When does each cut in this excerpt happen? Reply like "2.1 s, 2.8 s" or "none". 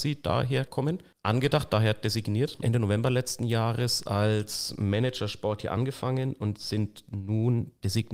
1.1 s, 2.6 s